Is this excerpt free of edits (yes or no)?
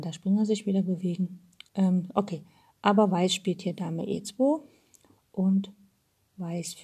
no